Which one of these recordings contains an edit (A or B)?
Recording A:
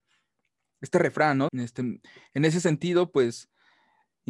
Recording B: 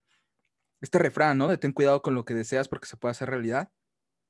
A